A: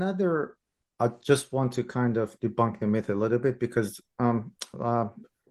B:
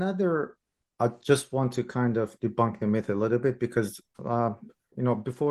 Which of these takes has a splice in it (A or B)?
B